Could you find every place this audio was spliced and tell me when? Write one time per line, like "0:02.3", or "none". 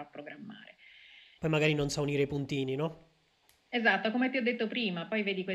0:01.4